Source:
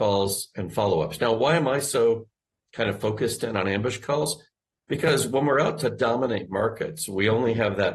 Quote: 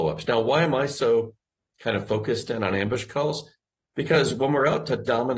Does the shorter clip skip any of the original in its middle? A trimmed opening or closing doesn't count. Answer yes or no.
no